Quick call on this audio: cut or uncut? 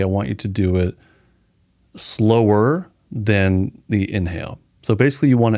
uncut